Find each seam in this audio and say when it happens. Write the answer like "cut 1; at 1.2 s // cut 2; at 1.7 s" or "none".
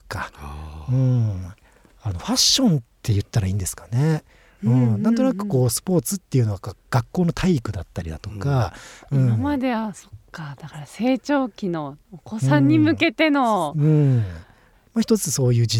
none